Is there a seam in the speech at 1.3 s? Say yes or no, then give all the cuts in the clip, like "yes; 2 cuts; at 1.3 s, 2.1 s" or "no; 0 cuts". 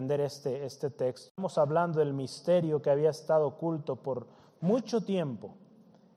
yes; 1 cut; at 1.3 s